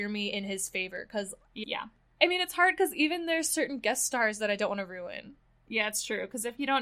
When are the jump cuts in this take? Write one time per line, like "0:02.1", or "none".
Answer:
0:01.6